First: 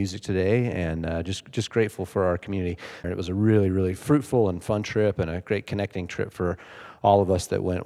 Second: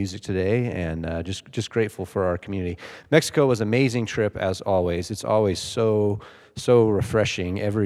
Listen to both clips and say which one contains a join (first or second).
first